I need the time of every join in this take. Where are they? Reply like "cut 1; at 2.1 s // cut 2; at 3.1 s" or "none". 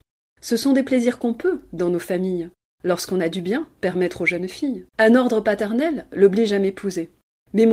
cut 1; at 4.9 s